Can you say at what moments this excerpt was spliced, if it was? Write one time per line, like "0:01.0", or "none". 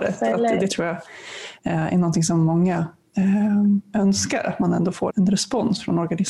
0:05.1